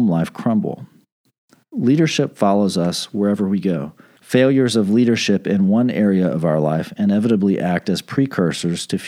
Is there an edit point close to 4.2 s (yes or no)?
yes